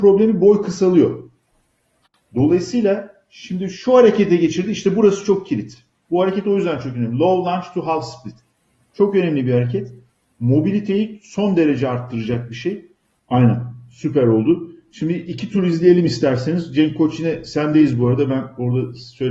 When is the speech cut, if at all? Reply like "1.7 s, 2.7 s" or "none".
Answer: 13.2 s